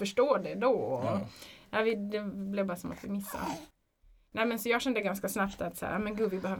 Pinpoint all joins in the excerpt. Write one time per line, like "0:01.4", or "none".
none